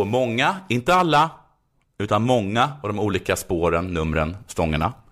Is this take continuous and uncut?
yes; 0 cuts

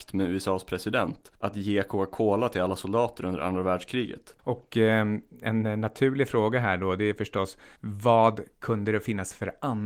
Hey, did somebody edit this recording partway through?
yes; 1 cut; at 4.4 s

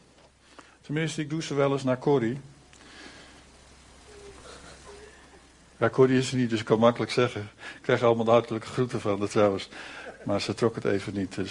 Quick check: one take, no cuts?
yes; 0 cuts

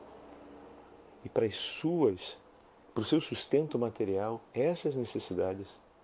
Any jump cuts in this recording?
no; 0 cuts

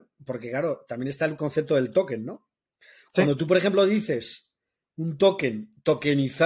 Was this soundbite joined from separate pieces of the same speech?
no; 0 cuts

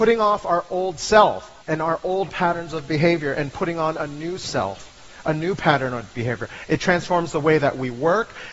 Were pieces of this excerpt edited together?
yes; 2 cuts; at 1.6 s, 6.7 s

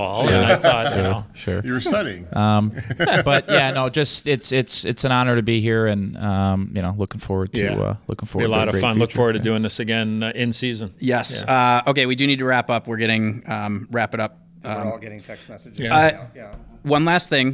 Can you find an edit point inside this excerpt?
no; 0 cuts

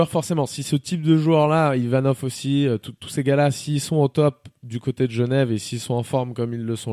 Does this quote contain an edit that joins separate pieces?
no; 0 cuts

